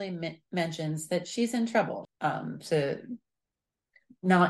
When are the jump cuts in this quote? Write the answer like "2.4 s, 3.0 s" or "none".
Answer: 2.0 s

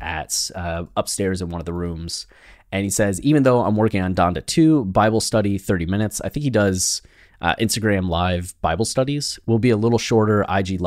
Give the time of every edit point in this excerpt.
none

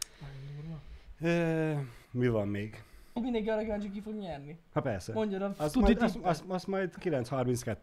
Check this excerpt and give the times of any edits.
2.0 s, 3.2 s

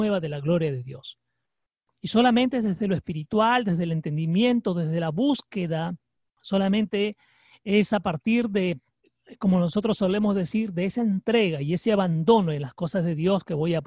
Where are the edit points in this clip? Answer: none

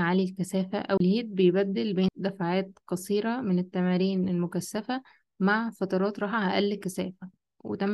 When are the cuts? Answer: 1.0 s

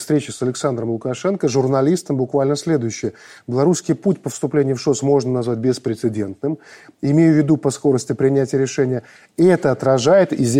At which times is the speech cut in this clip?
none

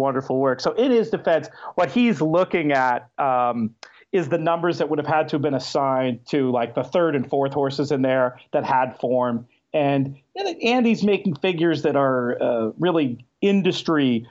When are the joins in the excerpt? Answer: none

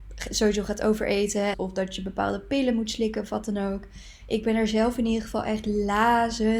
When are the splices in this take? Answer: 1.5 s, 4.2 s

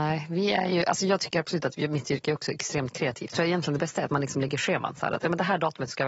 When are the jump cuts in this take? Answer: 3.3 s

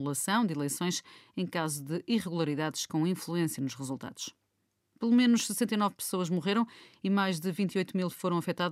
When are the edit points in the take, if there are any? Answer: none

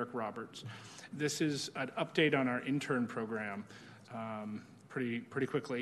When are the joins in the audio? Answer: 1.1 s, 4.0 s

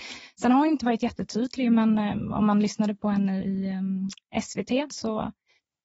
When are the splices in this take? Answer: 3.4 s, 4.9 s

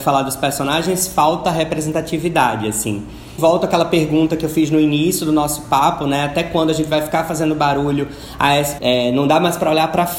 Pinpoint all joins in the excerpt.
3.4 s, 8.8 s

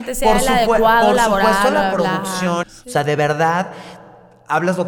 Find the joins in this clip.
2.6 s

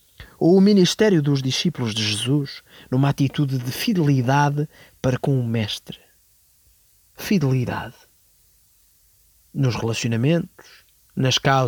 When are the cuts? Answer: 7.0 s

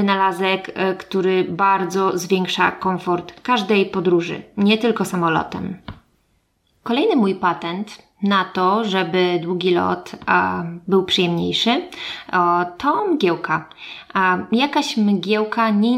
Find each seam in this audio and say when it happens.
none

